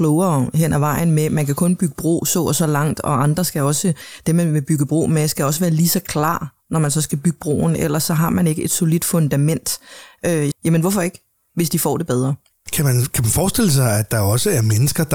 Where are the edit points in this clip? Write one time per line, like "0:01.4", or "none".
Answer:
0:10.5

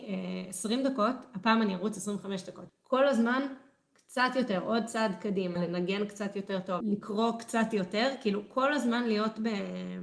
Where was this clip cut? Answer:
0:02.7
0:05.6
0:06.8

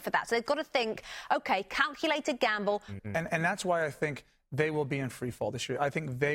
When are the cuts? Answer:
0:03.0

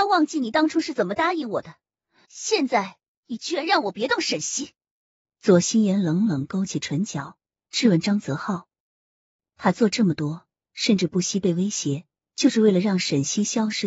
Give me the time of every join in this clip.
0:02.2

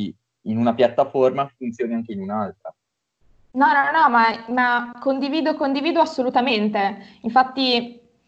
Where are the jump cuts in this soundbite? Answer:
none

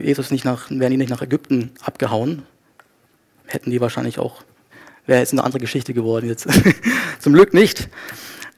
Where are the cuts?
0:03.4

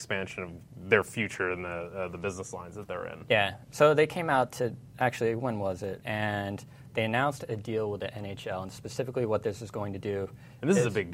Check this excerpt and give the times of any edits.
0:06.0

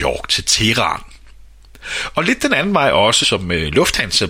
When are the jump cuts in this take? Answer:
0:02.1
0:03.2

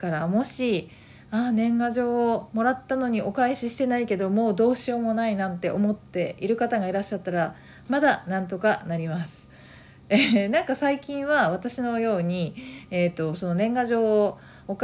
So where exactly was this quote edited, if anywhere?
none

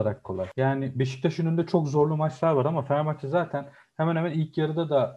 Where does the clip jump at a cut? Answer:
none

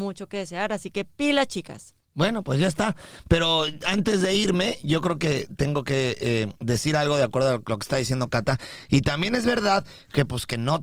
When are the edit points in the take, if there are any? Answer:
none

